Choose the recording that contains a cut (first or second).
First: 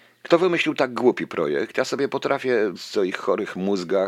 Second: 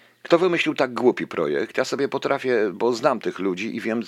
first